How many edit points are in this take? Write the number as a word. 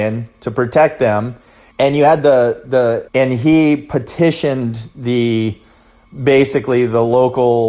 two